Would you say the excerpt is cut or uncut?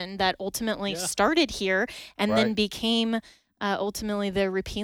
uncut